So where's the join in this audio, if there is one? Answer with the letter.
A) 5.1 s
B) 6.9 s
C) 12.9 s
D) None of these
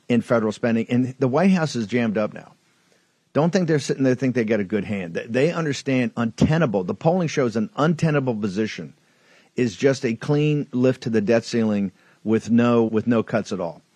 C